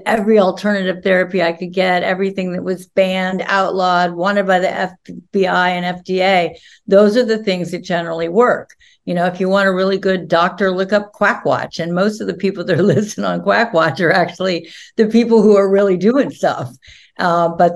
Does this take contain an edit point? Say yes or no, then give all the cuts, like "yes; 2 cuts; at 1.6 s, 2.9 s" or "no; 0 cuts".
no; 0 cuts